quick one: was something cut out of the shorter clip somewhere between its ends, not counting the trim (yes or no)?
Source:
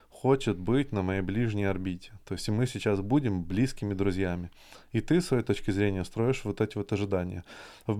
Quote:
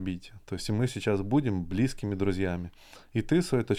no